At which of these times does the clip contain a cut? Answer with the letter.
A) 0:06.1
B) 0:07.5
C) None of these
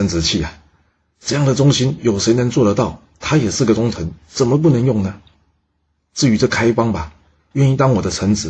B